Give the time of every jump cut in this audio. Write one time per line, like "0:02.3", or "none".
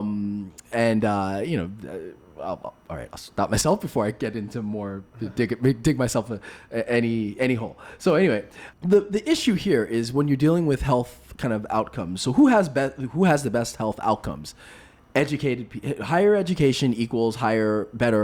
0:08.7